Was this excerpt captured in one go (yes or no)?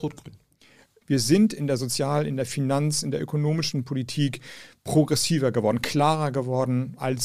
no